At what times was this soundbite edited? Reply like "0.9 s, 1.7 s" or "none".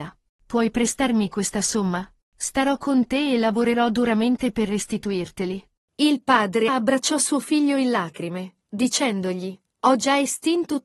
6.7 s